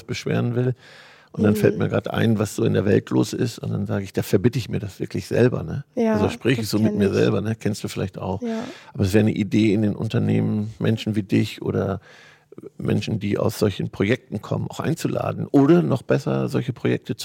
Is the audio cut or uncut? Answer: uncut